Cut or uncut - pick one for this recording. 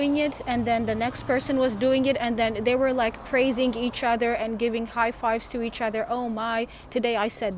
uncut